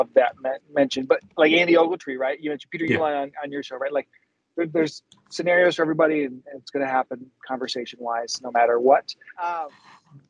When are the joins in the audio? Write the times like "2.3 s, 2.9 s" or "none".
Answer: 9.3 s